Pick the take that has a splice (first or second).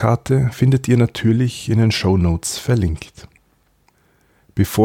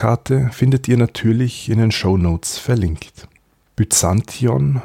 second